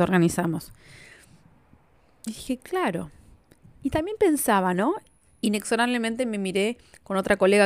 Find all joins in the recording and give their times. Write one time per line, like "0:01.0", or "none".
none